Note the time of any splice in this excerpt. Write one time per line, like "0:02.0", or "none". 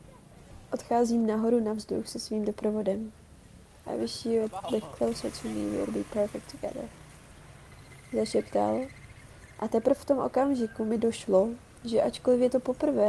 0:03.8